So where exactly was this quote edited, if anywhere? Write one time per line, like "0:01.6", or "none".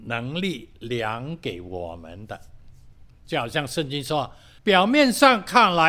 0:04.6